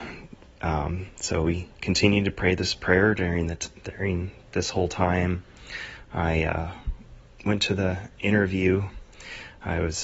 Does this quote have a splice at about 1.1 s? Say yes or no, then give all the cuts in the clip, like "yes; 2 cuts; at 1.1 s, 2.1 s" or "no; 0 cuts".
no; 0 cuts